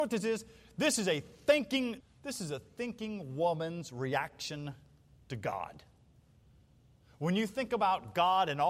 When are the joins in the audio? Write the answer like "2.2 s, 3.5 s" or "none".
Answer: 2.0 s